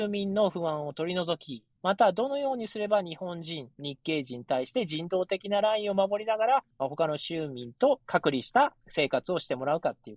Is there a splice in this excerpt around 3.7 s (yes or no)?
no